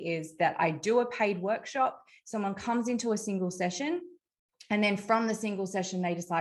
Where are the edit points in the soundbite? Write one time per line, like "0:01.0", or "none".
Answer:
none